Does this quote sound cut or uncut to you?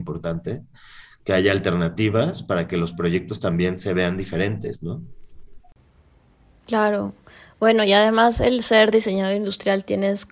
uncut